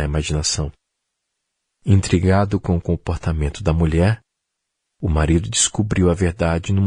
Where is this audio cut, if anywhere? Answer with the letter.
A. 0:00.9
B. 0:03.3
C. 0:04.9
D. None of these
D